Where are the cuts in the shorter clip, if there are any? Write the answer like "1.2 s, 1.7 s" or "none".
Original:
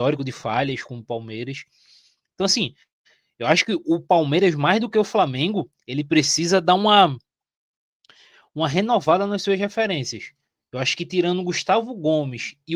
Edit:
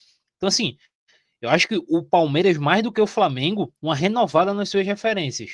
3.8 s